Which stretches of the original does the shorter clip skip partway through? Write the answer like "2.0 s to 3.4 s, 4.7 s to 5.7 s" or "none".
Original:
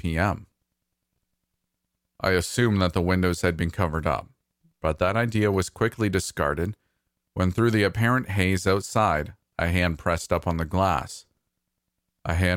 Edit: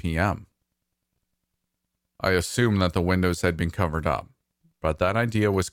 none